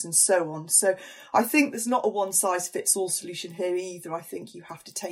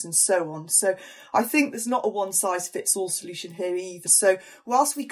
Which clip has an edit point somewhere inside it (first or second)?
second